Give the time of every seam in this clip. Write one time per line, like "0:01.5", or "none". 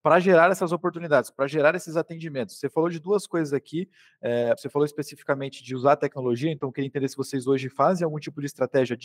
none

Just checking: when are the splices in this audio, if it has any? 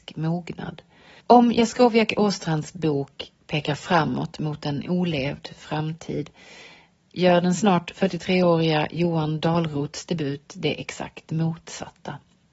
0:01.2

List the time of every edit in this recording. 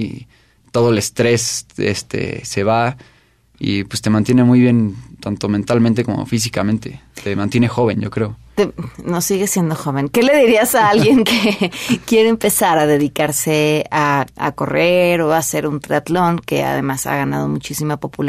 none

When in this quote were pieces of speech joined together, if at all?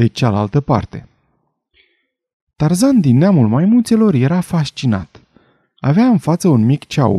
0:05.6

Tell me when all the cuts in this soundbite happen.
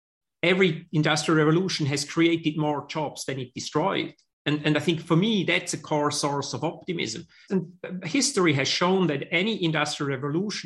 0:07.5

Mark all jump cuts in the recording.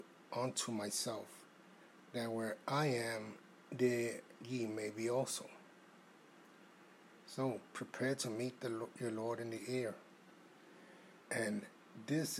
0:07.7
0:11.2

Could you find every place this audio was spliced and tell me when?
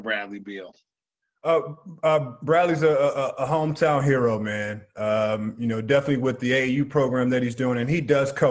none

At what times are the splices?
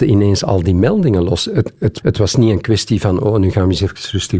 0:02.0

